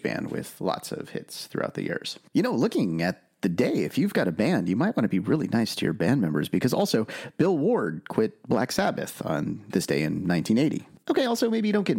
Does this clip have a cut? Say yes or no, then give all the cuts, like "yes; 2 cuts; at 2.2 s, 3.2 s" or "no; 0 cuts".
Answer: no; 0 cuts